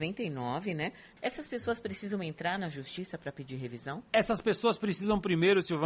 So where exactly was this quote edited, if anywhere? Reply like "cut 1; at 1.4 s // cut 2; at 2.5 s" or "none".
cut 1; at 1.2 s